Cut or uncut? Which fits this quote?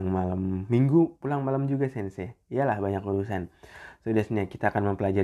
uncut